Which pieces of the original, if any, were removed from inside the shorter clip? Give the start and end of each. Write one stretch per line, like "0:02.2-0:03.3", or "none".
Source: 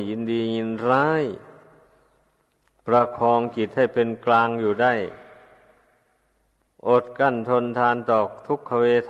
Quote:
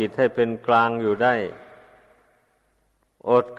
none